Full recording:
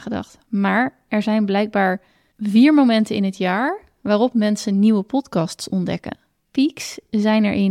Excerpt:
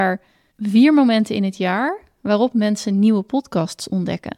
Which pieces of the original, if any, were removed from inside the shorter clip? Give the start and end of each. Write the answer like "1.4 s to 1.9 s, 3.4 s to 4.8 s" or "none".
none